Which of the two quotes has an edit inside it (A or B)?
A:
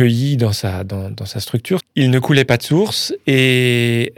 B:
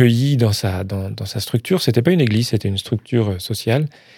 A